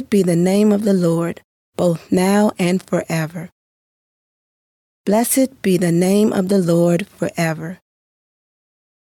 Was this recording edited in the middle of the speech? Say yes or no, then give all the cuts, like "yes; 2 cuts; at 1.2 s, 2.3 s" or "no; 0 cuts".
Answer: no; 0 cuts